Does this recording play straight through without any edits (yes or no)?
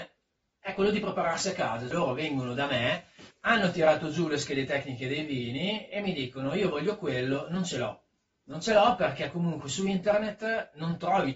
no